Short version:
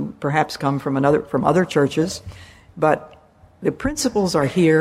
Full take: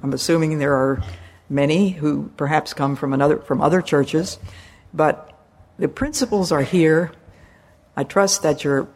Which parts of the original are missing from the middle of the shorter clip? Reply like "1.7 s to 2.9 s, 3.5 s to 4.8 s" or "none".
none

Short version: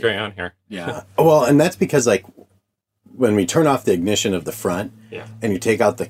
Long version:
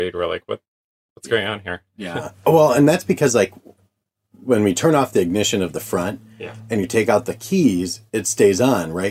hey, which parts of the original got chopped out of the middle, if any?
none

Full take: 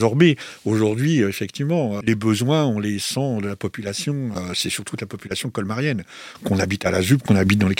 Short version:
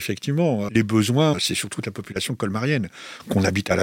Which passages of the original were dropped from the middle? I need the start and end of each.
2.6 s to 4.5 s

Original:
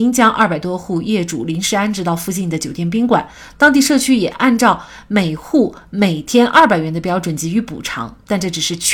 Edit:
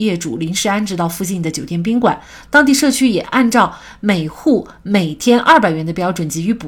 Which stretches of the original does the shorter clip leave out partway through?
none

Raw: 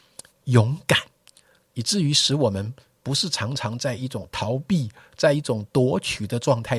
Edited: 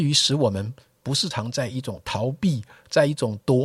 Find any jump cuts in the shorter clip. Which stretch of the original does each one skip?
3.3 s to 3.6 s

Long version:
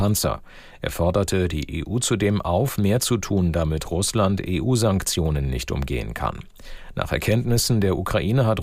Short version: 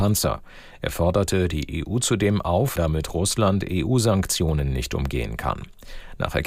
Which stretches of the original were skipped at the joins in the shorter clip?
2.8 s to 3.5 s

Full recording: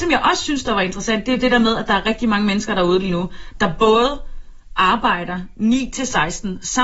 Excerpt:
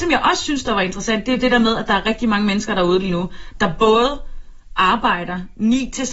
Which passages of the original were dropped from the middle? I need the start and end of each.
none

